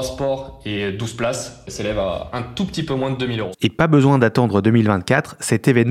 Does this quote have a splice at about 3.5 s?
yes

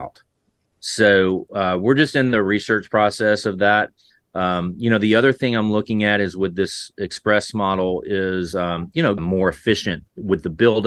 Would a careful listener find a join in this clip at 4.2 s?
no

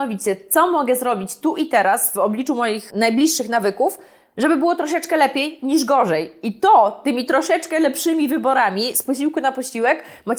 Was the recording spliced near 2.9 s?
yes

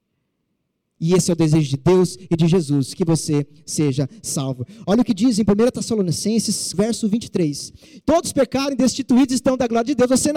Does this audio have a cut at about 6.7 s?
yes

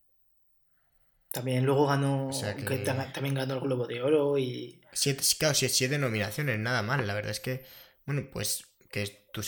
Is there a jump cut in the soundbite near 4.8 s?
no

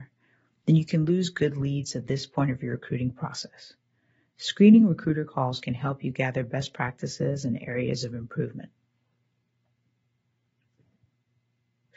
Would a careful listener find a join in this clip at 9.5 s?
no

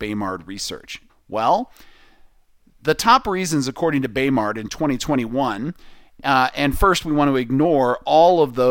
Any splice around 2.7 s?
no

